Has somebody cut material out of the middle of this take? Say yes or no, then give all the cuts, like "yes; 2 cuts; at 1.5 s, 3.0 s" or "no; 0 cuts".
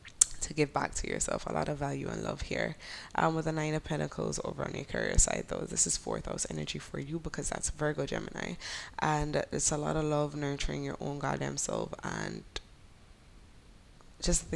no; 0 cuts